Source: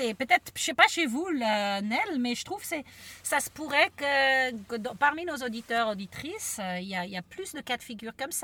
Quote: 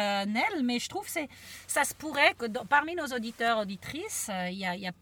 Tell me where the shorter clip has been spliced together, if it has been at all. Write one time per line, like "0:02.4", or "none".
0:02.4